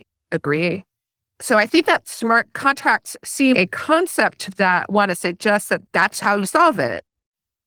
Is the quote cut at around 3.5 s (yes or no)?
yes